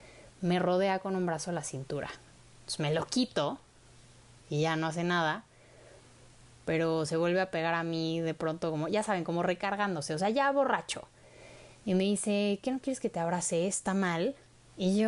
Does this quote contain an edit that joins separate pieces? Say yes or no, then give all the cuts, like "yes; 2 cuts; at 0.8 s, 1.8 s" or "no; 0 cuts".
no; 0 cuts